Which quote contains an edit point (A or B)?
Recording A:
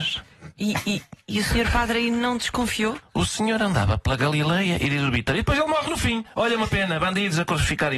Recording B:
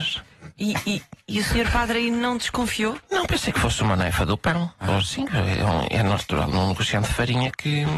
A